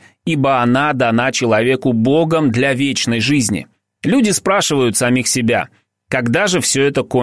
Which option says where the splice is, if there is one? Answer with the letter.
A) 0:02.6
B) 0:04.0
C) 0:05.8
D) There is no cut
B